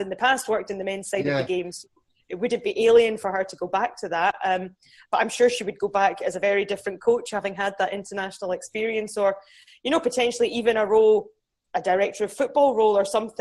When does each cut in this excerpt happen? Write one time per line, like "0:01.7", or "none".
none

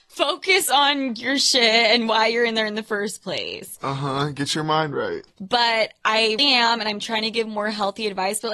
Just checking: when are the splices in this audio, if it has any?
0:05.3
0:06.4

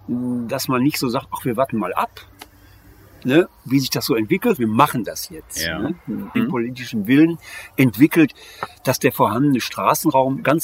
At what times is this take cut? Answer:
0:04.6
0:06.3

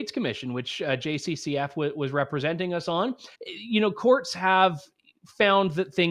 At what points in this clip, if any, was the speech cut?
0:03.3

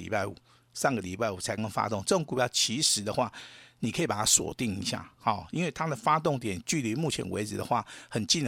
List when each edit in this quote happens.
0:01.6

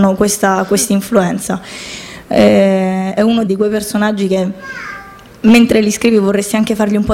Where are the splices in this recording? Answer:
0:02.2
0:03.5

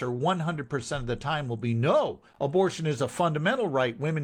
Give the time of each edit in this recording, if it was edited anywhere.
0:02.3

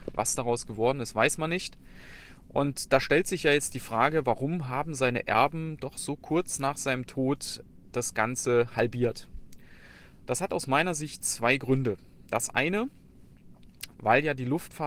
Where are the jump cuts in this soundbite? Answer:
0:13.9

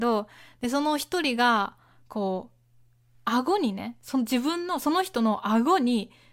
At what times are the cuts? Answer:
none

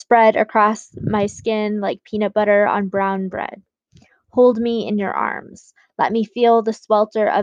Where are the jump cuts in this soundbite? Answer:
none

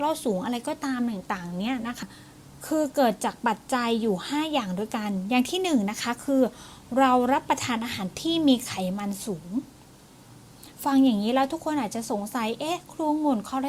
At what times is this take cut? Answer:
0:02.0

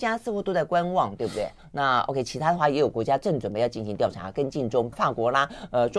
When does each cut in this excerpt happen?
0:01.6
0:04.9

